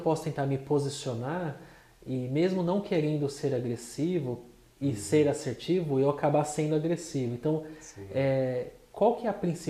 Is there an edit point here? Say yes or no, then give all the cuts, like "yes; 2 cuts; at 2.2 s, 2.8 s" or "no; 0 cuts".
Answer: no; 0 cuts